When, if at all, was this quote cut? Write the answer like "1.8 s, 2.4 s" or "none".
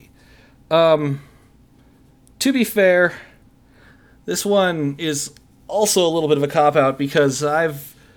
none